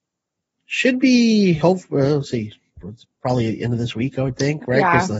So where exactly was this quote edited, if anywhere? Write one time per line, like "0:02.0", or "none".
none